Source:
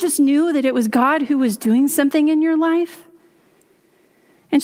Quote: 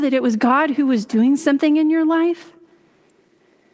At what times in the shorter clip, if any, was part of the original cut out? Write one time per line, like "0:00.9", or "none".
none